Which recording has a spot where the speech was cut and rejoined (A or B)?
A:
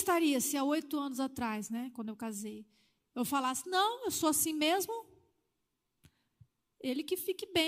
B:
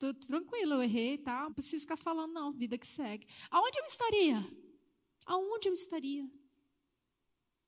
B